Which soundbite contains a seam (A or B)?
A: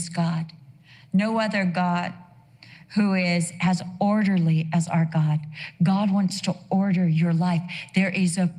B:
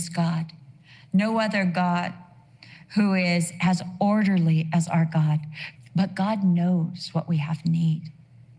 B